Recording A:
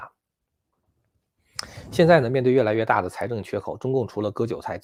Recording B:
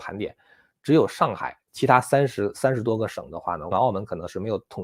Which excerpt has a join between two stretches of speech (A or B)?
B